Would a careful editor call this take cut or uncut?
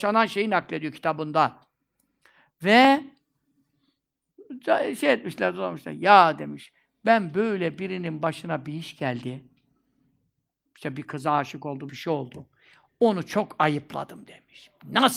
cut